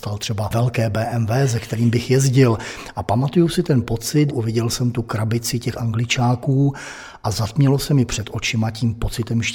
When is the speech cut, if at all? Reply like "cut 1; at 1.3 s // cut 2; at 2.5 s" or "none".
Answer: cut 1; at 4.3 s